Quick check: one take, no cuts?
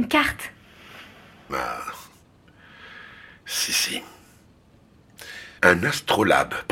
no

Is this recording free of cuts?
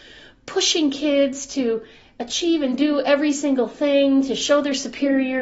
yes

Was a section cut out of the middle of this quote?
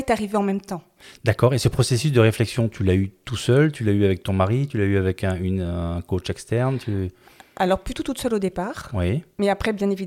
no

